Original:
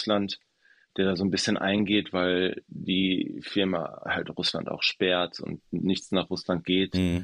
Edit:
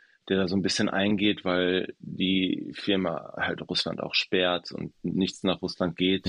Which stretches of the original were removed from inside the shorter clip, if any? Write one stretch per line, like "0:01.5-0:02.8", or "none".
none